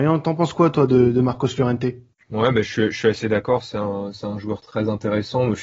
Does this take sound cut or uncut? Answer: uncut